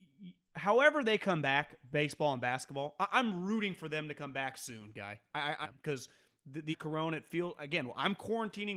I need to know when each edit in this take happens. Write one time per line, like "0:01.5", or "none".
0:05.6
0:06.7